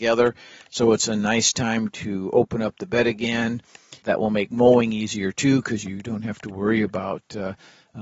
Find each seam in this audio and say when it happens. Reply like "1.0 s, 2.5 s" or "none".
4.0 s